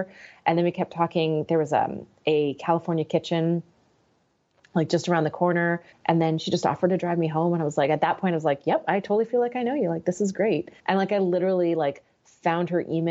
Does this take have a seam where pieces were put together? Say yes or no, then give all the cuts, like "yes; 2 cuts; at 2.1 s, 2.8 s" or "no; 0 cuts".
yes; 2 cuts; at 5.9 s, 10.8 s